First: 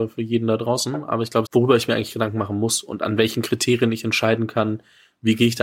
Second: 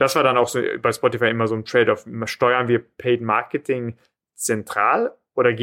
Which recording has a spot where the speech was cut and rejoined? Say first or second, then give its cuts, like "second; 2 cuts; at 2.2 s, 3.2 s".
first; 1 cut; at 1.5 s